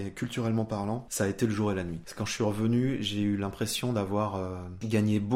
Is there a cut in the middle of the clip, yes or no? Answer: no